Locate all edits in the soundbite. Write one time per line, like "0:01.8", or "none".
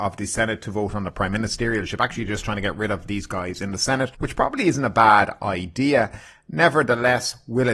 none